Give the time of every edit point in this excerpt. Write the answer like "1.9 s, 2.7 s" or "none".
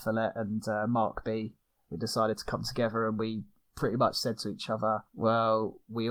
5.1 s